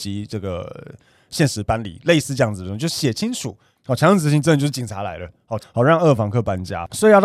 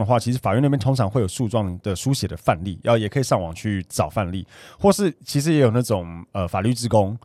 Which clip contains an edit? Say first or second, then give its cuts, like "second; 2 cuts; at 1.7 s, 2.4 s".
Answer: first; 2 cuts; at 3.8 s, 5.6 s